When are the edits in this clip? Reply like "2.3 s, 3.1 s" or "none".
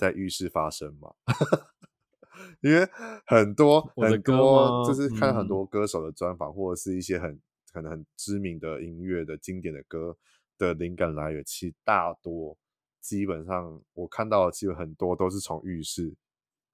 none